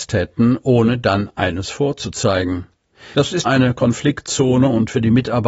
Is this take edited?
yes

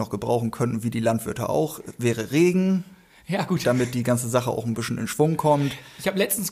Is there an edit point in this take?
no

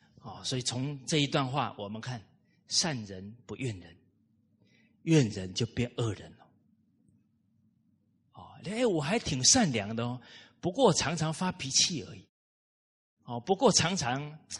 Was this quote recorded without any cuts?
yes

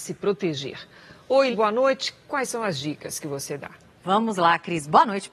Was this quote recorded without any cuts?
no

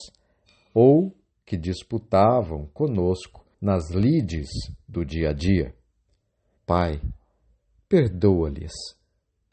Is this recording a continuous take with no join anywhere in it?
no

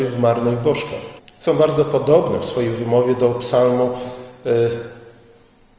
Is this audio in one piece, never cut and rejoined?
no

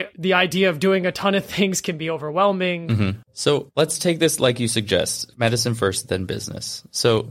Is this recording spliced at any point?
yes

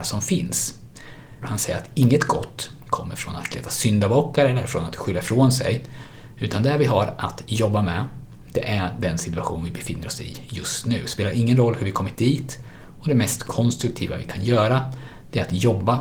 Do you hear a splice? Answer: yes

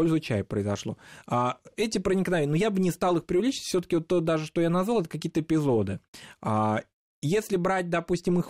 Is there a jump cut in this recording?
yes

